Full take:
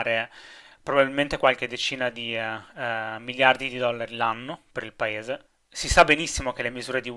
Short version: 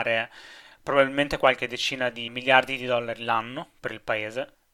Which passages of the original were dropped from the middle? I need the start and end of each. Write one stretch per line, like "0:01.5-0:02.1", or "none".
0:02.3-0:03.2